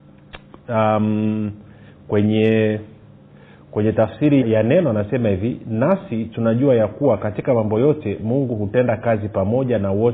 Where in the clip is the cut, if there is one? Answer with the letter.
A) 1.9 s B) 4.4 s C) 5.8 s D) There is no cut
B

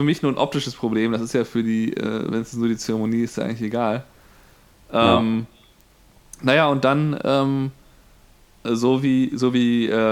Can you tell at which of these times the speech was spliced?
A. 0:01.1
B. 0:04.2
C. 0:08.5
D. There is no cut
D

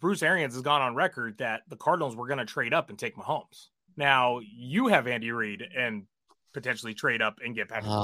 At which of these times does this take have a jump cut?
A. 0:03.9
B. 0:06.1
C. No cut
A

